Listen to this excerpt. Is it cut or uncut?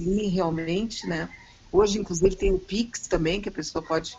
uncut